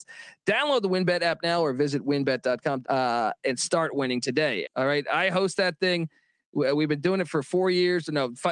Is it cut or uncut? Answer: cut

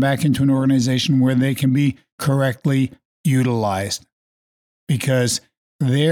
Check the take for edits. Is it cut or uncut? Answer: uncut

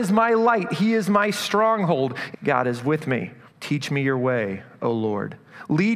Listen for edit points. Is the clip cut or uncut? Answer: cut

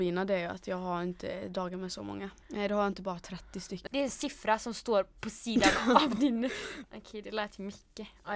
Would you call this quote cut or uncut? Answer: cut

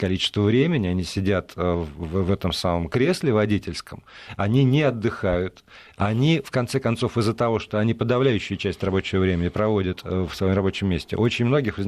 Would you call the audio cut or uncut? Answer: uncut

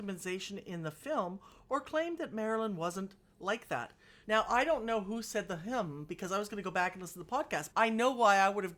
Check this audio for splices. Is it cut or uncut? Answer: cut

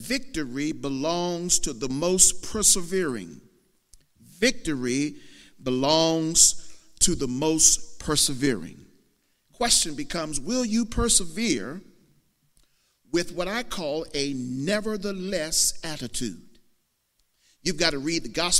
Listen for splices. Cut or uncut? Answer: uncut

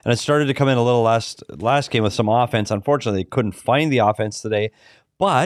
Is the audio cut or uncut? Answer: uncut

